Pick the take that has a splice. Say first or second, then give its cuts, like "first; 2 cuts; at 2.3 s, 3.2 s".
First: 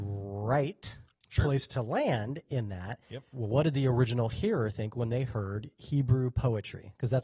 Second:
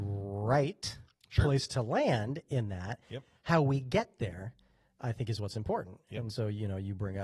first; 1 cut; at 3.3 s